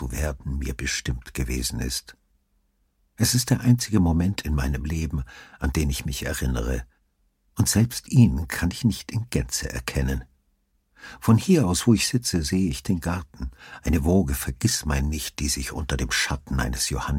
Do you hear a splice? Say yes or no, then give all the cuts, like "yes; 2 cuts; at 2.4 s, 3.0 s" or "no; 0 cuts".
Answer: no; 0 cuts